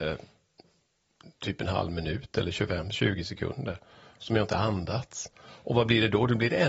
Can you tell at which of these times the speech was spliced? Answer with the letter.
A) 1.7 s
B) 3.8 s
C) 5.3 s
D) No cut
D